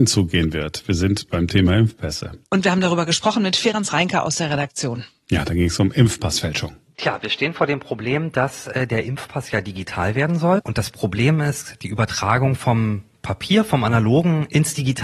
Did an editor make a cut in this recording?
yes; 2 cuts; at 2.5 s, 10.6 s

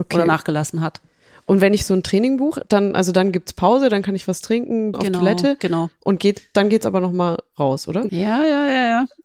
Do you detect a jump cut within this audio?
yes; 2 cuts; at 4.9 s, 8.1 s

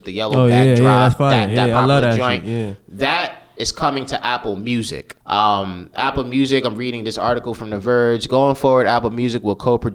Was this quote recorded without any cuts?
no; 1 cut; at 5.2 s

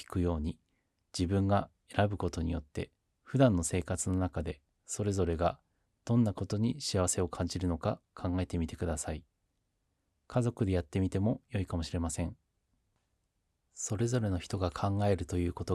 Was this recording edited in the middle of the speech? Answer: no; 0 cuts

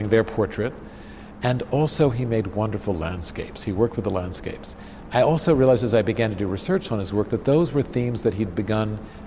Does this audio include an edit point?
no; 0 cuts

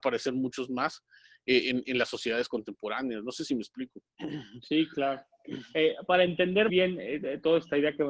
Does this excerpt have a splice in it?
yes; 1 cut; at 6.7 s

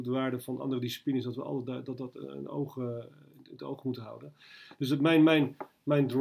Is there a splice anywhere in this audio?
no; 0 cuts

